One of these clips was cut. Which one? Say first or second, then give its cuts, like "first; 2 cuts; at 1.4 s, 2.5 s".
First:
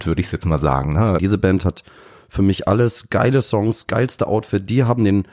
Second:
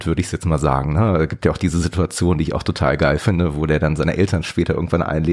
first; 1 cut; at 1.2 s